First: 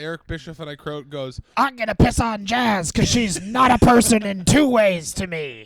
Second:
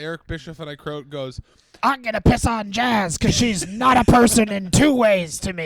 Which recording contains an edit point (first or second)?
first